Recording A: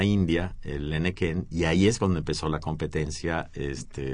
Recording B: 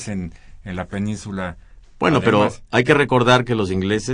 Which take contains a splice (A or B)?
B